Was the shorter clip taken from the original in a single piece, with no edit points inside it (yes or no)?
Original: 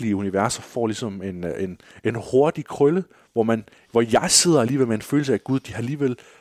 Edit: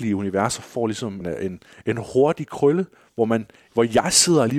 no